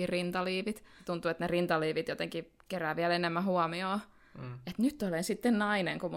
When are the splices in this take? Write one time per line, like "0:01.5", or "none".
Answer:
none